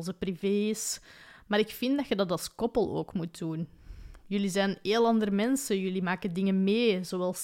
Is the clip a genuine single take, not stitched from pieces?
no; 1 cut; at 4.2 s

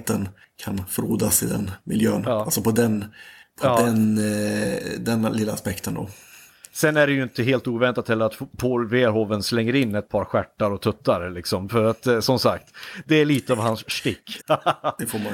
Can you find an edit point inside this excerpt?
yes; 1 cut; at 14.4 s

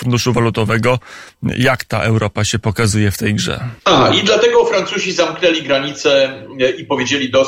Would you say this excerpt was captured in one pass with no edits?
no; 1 cut; at 3.8 s

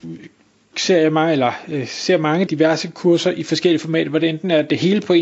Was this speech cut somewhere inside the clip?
yes; 1 cut; at 2.5 s

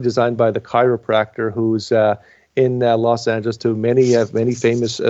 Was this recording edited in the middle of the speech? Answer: no; 0 cuts

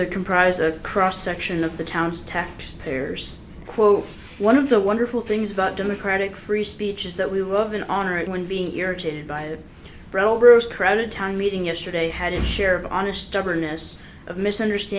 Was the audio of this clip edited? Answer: yes; 2 cuts; at 3.6 s, 8.3 s

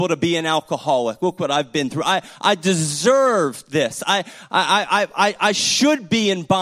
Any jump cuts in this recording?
no; 0 cuts

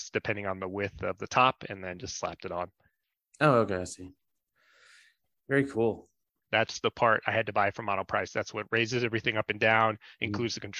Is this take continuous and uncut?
no; 1 cut; at 6.4 s

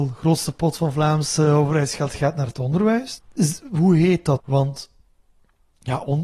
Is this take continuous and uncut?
no; 2 cuts; at 3.2 s, 4.4 s

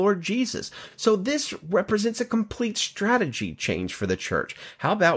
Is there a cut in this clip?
no; 0 cuts

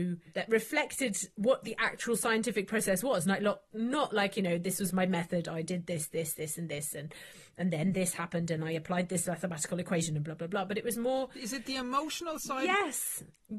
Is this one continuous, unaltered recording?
yes; 0 cuts

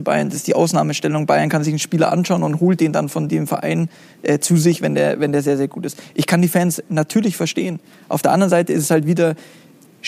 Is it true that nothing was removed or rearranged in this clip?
yes; 0 cuts

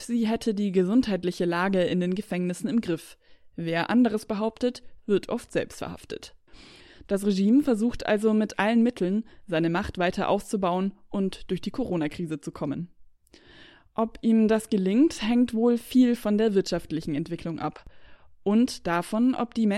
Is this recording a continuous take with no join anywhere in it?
no; 1 cut; at 5.0 s

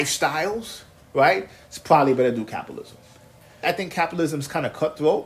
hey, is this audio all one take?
no; 1 cut; at 3.6 s

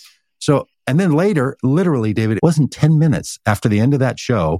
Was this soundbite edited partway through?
yes; 1 cut; at 2.4 s

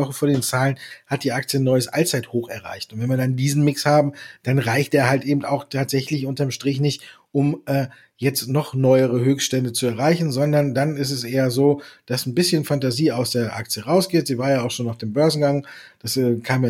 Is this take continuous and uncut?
yes; 0 cuts

